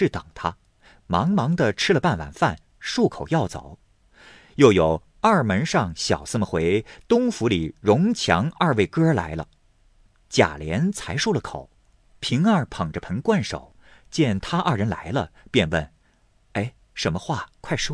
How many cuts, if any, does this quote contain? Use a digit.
0